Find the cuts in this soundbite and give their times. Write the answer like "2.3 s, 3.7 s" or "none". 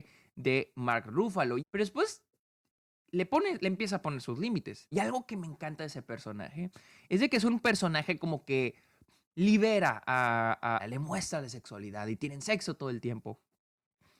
1.6 s, 4.9 s, 10.8 s